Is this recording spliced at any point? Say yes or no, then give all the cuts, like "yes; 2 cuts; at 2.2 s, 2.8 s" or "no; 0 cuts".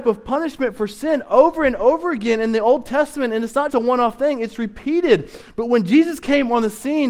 yes; 1 cut; at 3.7 s